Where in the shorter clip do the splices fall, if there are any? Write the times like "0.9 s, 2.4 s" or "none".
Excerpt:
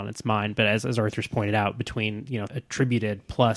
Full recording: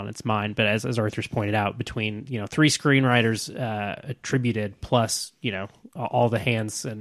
2.5 s